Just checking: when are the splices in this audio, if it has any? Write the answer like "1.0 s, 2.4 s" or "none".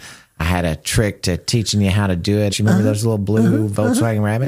2.5 s